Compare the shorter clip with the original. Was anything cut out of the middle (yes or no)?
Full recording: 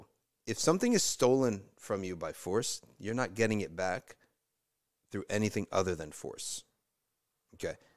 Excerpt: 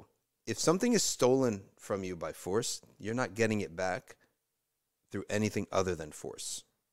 no